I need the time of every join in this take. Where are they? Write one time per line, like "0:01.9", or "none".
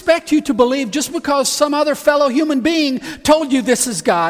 none